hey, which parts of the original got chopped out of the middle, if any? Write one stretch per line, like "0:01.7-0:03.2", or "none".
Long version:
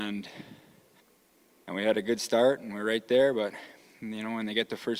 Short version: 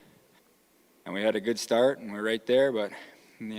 none